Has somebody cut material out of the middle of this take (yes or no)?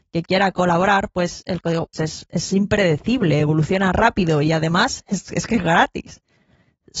yes